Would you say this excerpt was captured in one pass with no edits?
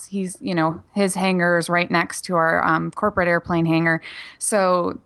yes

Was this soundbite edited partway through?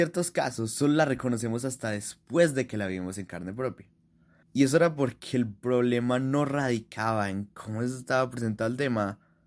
yes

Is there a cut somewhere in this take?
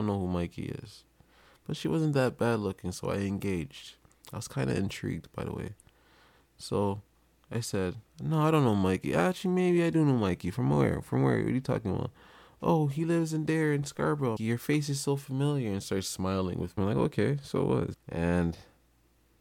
yes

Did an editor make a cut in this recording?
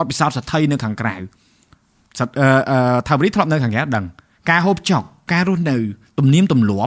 no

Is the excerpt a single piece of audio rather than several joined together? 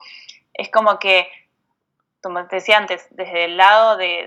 yes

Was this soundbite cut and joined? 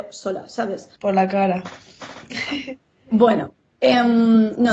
yes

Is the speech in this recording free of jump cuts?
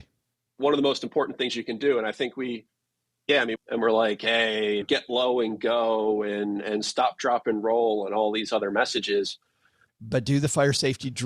no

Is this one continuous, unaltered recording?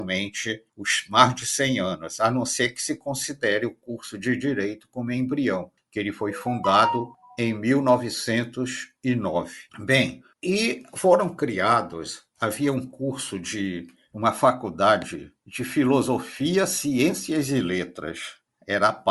no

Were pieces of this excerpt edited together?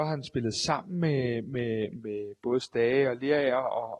no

